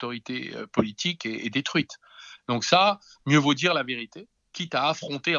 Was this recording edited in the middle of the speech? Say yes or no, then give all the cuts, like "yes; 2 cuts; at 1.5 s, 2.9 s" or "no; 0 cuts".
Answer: no; 0 cuts